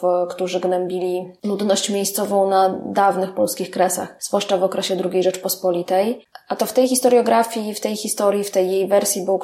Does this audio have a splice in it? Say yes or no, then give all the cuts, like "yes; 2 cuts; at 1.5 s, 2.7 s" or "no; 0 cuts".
yes; 1 cut; at 6.3 s